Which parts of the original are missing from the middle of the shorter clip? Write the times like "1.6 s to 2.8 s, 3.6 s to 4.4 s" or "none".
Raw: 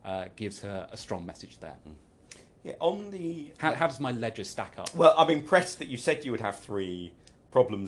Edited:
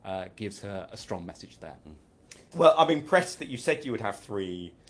2.5 s to 4.9 s